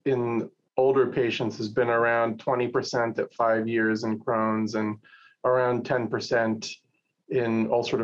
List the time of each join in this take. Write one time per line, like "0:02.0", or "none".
none